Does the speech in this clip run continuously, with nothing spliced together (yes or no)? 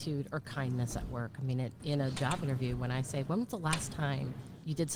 no